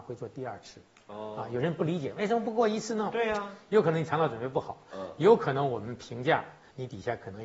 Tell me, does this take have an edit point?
no; 0 cuts

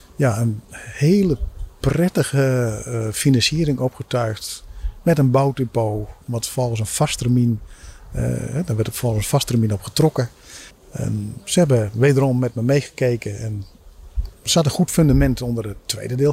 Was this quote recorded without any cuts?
no; 1 cut; at 10.7 s

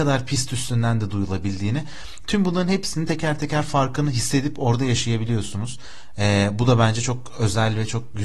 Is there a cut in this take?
no; 0 cuts

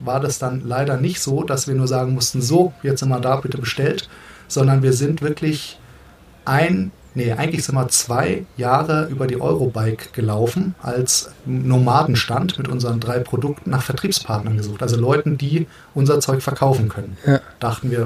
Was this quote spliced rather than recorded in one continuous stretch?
yes; 2 cuts; at 11.3 s, 13.7 s

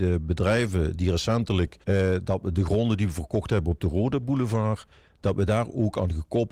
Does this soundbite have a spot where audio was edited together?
yes; 1 cut; at 1.8 s

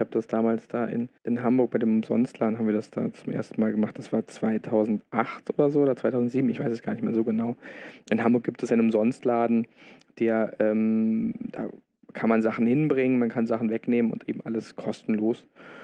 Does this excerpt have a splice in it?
yes; 1 cut; at 1.2 s

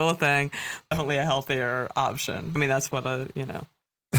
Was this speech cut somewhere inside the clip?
yes; 2 cuts; at 0.9 s, 2.6 s

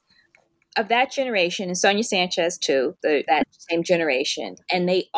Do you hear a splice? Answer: yes; 1 cut; at 3.3 s

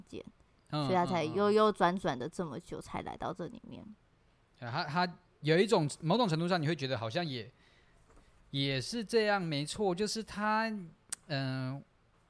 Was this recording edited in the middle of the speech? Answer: no; 0 cuts

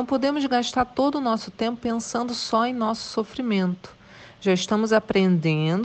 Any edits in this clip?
no; 0 cuts

